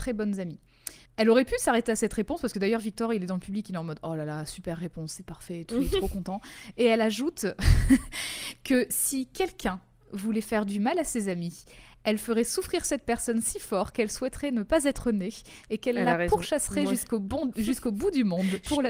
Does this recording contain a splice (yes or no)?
yes